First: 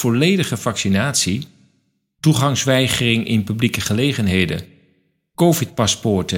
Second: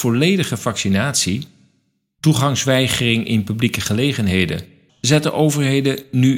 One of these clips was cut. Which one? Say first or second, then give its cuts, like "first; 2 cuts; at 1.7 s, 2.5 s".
second; 1 cut; at 4.9 s